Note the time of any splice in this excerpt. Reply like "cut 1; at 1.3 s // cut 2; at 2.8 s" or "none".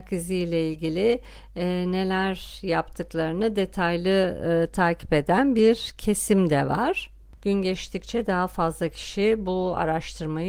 cut 1; at 7.4 s